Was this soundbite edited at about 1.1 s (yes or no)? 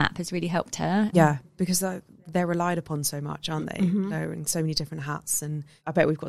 yes